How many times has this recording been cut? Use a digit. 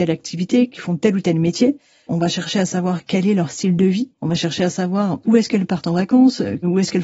1